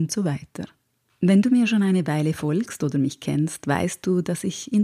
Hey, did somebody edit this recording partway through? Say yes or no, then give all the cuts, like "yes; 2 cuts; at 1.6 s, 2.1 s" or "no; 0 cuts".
no; 0 cuts